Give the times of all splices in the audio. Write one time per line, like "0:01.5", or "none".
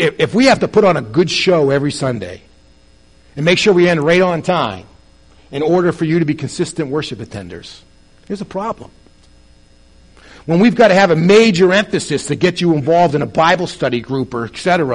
none